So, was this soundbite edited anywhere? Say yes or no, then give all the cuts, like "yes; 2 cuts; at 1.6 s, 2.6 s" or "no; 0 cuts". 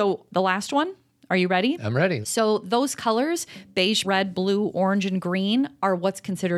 yes; 2 cuts; at 2.2 s, 4.0 s